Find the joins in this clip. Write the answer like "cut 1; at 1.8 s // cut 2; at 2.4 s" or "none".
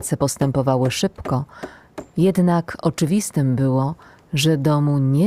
none